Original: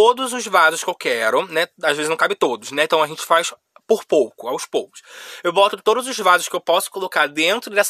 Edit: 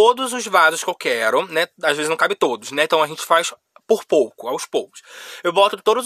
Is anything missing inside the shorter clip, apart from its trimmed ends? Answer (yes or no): no